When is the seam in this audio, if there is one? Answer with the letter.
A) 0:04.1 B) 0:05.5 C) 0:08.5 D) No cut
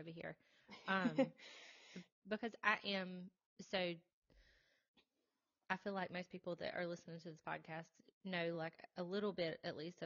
D